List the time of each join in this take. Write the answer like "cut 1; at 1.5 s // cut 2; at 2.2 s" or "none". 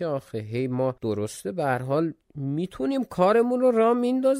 cut 1; at 1.0 s // cut 2; at 2.2 s